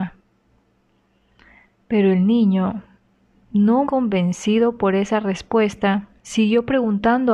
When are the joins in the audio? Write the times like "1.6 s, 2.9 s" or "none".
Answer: 3.8 s